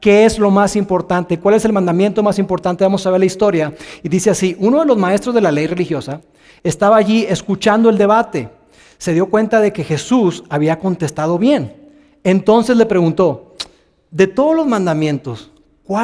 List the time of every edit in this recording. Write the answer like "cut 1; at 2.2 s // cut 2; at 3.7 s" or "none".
none